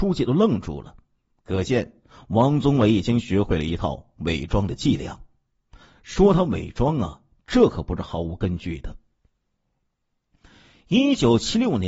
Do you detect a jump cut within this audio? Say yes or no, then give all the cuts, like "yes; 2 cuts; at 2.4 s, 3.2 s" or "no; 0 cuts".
no; 0 cuts